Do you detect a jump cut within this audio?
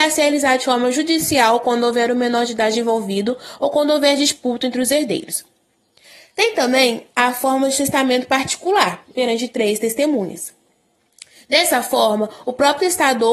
yes; 1 cut; at 9.1 s

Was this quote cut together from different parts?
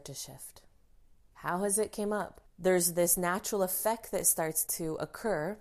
yes; 3 cuts; at 1.3 s, 2.5 s, 4.7 s

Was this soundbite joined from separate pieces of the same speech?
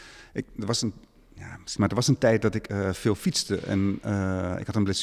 yes; 1 cut; at 1.8 s

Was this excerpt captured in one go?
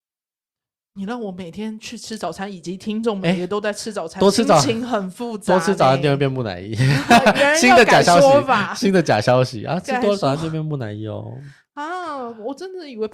yes; 0 cuts

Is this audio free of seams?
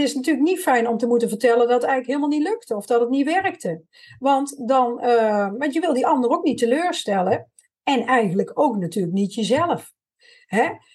yes; 0 cuts

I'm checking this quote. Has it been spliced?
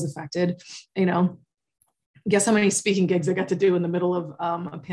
no; 0 cuts

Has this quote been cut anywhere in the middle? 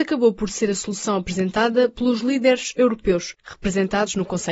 no; 0 cuts

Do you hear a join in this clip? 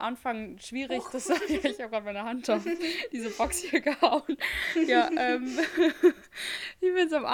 no; 0 cuts

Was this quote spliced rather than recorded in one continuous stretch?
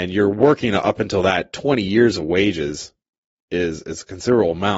no; 0 cuts

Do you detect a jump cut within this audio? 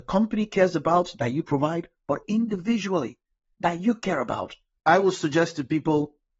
yes; 2 cuts; at 2.2 s, 4.8 s

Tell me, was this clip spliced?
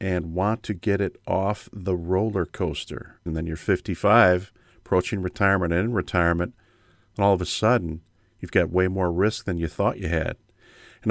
yes; 1 cut; at 3.3 s

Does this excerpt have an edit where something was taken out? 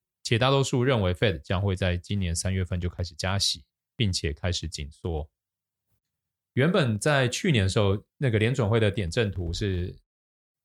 yes; 2 cuts; at 6.4 s, 8.1 s

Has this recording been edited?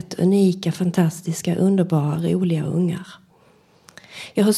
no; 0 cuts

